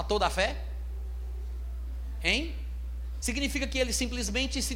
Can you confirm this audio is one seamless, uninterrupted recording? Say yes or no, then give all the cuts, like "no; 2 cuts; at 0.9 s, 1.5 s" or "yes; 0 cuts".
no; 1 cut; at 3.2 s